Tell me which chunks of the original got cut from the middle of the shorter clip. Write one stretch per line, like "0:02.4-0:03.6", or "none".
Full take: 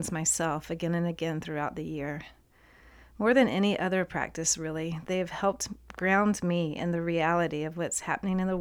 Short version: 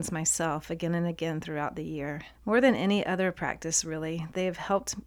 0:02.3-0:03.1